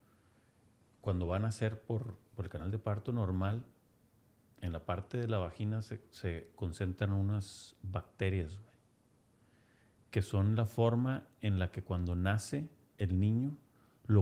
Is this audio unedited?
yes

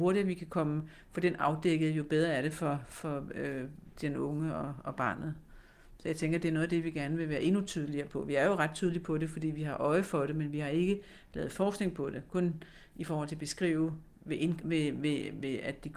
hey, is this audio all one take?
yes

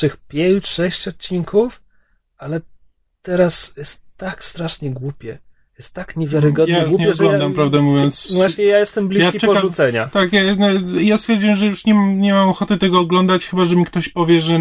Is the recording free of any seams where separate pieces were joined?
yes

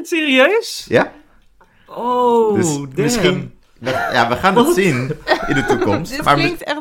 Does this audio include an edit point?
no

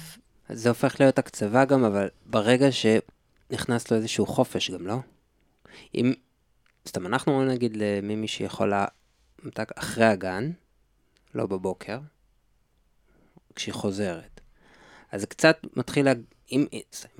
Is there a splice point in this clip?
no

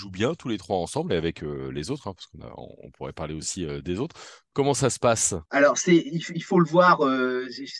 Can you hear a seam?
yes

